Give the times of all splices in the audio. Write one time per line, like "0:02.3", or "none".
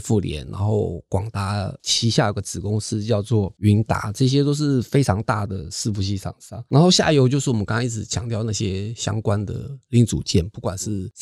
none